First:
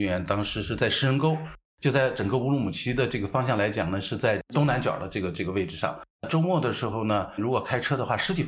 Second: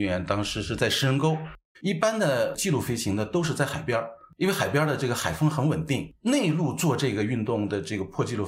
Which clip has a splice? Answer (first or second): second